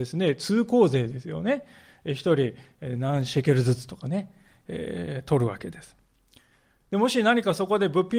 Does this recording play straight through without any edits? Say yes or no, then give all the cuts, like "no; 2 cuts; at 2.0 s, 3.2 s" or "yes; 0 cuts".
yes; 0 cuts